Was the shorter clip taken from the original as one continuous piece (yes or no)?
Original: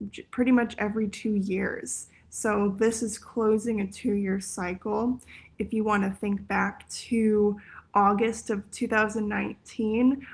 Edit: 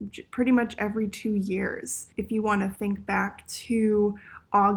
no